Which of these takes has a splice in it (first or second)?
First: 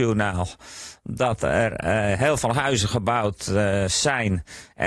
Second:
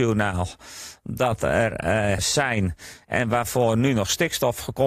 second